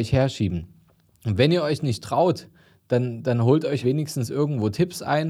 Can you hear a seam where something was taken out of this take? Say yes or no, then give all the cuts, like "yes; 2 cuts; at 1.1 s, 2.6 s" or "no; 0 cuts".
yes; 1 cut; at 3.8 s